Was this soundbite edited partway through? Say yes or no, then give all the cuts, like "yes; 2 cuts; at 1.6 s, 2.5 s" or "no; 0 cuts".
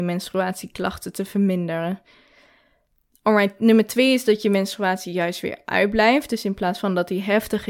no; 0 cuts